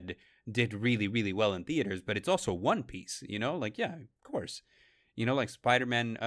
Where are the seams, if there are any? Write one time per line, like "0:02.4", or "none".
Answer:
none

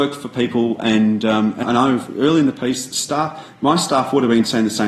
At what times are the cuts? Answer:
0:01.6

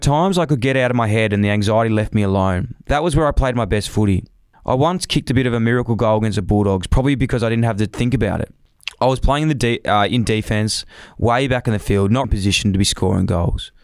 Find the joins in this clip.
0:12.2

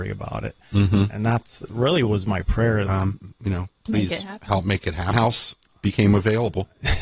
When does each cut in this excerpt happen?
0:02.9
0:05.1

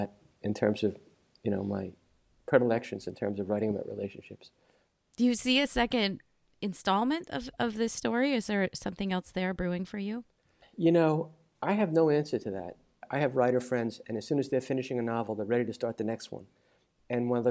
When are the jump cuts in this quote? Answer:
none

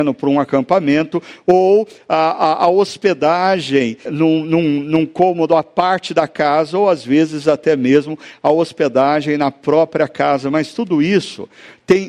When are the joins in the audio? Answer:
0:04.1

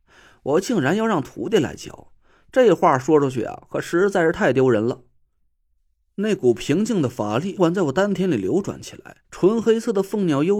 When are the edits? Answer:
0:07.6
0:09.2

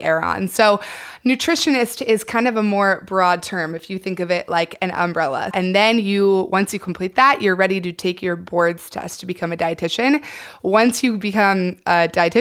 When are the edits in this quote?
0:05.5

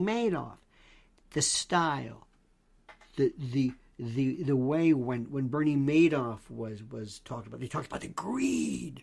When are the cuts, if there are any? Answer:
none

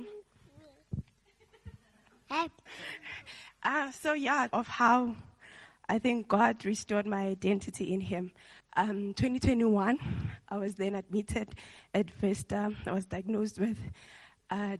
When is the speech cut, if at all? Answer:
0:02.7
0:04.5
0:08.6

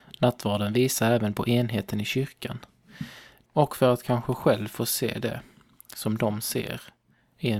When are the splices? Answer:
0:03.4

